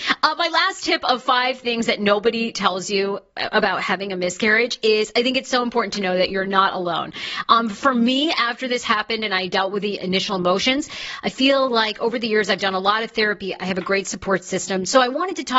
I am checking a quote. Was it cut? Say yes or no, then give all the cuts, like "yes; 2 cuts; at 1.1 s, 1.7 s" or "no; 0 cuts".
no; 0 cuts